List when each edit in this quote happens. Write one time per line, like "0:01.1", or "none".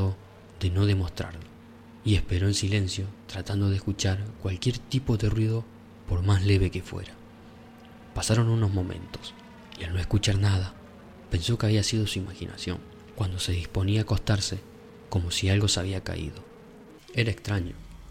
0:13.1
0:15.0
0:17.0